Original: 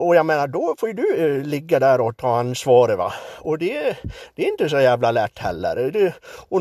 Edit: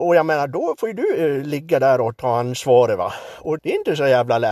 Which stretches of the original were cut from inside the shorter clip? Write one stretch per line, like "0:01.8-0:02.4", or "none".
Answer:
0:03.6-0:04.3